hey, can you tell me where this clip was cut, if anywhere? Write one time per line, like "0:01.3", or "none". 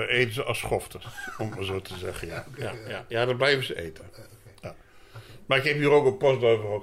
none